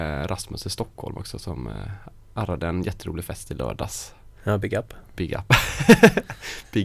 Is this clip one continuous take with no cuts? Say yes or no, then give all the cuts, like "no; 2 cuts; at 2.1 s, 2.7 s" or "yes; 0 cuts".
yes; 0 cuts